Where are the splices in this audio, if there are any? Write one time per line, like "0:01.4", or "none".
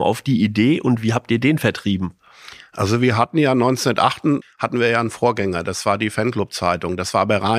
0:04.4

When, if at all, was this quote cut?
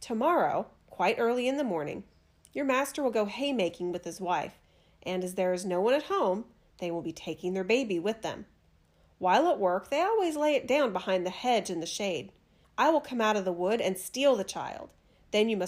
0:12.6

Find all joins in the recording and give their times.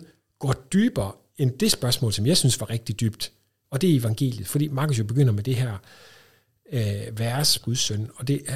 0:03.6
0:07.6

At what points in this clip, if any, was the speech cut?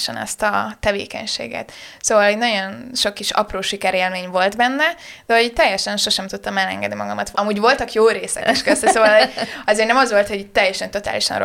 0:07.3

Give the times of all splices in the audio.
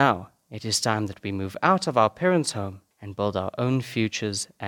0:02.9

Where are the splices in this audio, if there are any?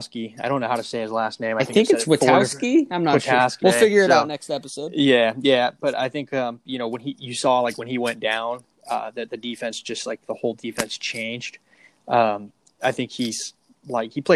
0:03.6

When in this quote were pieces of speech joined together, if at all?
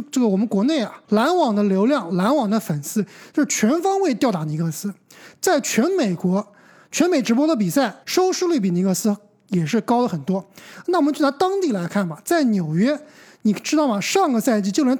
0:01.0
0:08.0

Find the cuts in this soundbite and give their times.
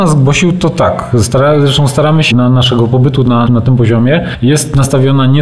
0:02.3
0:03.5

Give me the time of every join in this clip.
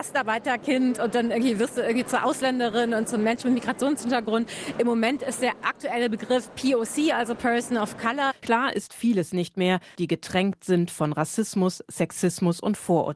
0:09.9

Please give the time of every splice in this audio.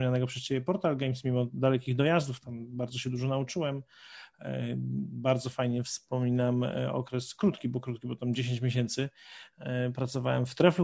none

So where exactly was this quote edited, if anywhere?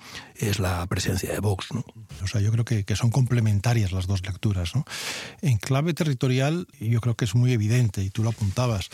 0:02.2

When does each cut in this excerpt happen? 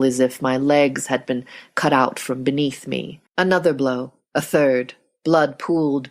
0:03.3

